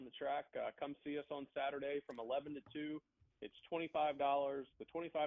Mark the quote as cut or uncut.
uncut